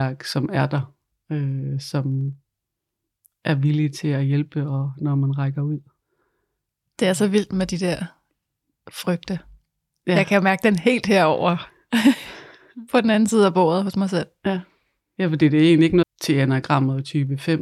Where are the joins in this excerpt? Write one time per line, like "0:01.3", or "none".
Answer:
0:15.0
0:16.0